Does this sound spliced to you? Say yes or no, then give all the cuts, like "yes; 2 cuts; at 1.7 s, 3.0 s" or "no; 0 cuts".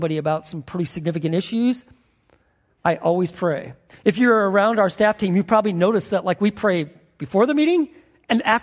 no; 0 cuts